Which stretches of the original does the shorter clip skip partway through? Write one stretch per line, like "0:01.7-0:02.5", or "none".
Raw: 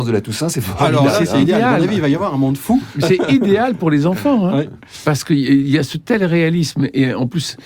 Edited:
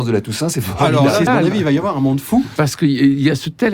0:01.3-0:01.6
0:02.9-0:05.0

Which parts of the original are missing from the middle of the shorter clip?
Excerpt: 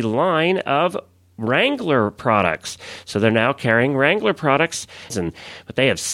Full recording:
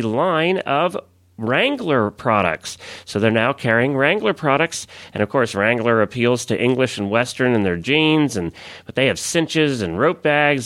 0:05.1-0:08.3

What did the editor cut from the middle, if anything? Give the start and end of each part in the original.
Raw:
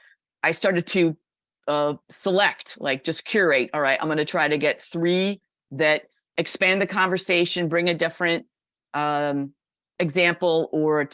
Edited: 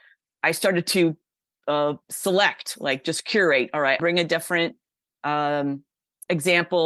0:04.0-0:07.7

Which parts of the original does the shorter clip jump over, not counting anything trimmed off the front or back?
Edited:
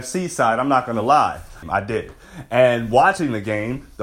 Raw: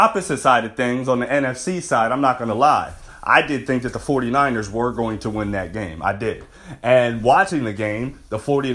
0:03.2-0:05.9

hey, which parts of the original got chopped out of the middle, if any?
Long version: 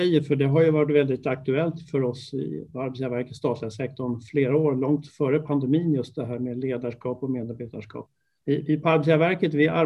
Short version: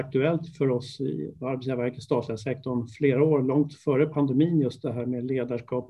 none

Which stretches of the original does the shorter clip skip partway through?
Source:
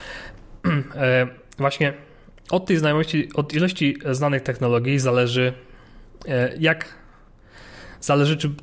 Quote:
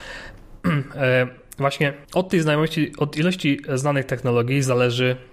0:02.0-0:02.4

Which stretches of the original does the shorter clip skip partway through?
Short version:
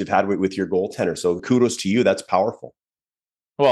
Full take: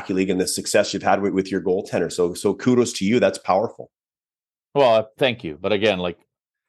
0:02.3-0:02.6

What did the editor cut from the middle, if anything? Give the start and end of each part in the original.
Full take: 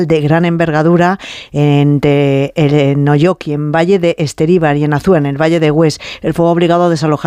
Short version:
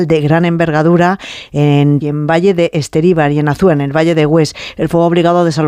0:02.0-0:03.5

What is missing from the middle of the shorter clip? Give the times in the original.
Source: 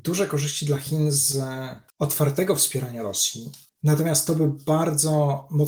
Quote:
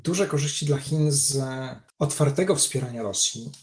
none

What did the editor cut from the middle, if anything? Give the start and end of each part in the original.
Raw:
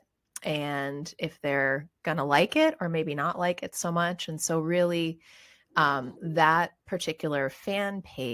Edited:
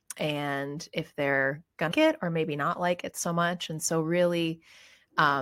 0:02.2-0:02.5

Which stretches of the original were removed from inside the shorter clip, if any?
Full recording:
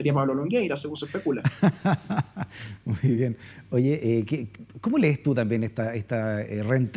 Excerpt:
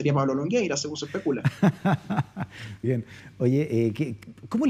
0:02.8-0:03.2

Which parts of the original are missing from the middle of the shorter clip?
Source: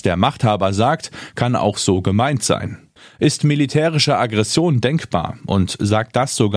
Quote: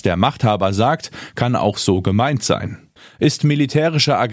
none

